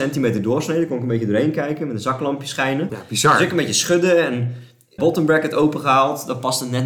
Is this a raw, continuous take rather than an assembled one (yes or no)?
no